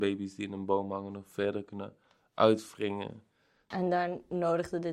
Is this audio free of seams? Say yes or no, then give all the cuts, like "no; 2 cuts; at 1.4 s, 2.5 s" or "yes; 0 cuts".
no; 1 cut; at 3.7 s